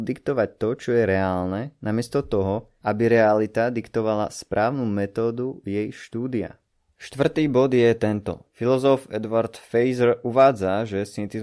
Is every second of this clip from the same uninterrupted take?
no; 1 cut; at 8.5 s

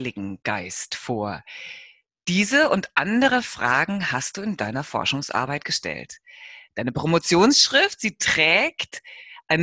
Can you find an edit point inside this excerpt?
no; 0 cuts

